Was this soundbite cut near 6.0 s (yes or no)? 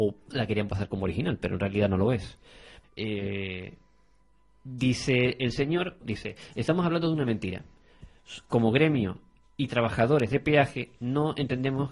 yes